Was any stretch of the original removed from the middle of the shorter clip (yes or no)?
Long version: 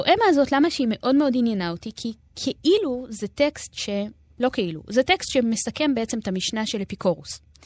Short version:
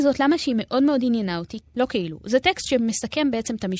yes